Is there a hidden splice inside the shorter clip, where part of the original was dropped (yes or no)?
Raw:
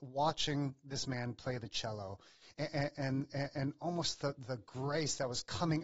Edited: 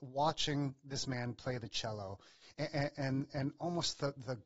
yes